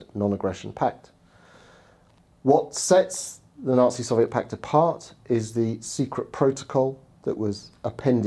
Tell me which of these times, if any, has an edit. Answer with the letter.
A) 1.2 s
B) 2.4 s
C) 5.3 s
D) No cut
D